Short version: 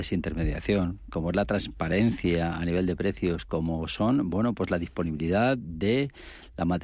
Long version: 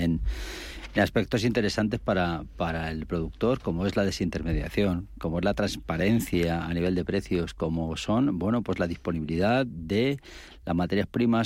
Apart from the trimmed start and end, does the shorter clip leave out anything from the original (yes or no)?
no